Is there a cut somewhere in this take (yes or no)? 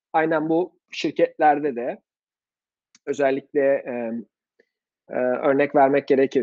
no